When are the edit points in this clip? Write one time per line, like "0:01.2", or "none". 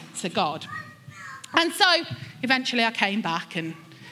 none

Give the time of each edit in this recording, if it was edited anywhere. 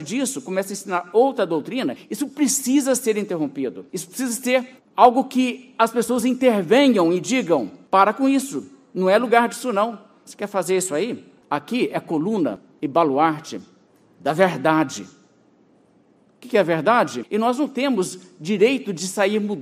0:11.4
0:17.2

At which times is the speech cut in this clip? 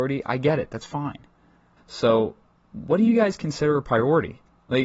0:01.8

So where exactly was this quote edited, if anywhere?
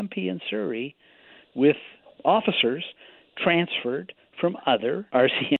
none

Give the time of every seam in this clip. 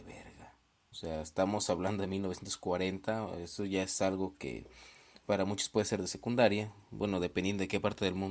0:00.9

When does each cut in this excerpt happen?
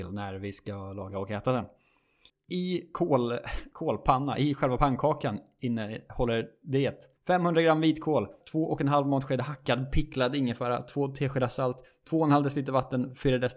0:02.3
0:07.2
0:08.4

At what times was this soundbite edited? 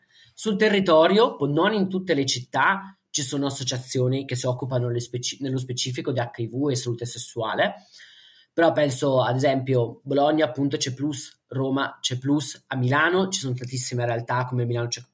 0:01.4

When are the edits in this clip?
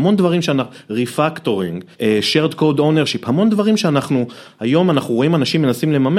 0:01.9

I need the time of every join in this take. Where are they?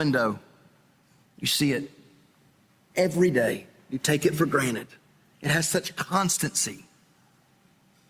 0:01.3

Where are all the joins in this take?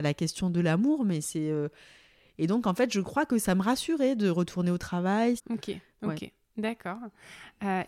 0:05.4

